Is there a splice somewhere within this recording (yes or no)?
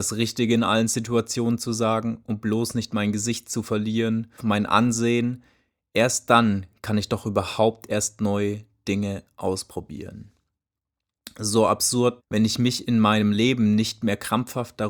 yes